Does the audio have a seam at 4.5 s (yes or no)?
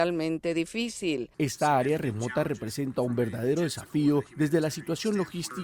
no